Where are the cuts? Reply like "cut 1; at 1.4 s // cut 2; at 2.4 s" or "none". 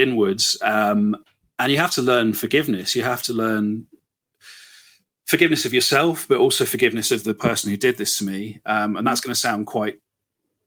none